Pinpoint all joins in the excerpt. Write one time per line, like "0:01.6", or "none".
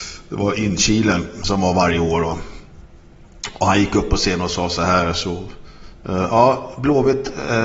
none